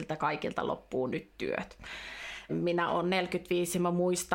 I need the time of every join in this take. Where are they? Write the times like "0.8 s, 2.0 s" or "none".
2.5 s